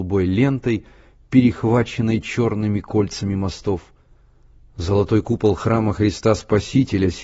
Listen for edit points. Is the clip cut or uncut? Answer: uncut